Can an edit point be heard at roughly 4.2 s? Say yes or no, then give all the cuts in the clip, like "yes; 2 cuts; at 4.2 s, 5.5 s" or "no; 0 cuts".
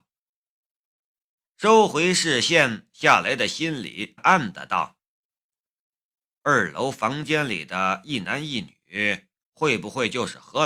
yes; 1 cut; at 4.2 s